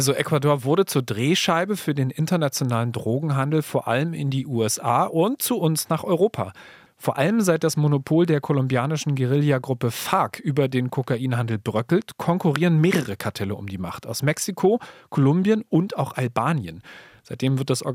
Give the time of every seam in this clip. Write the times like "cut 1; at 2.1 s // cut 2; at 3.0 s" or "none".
none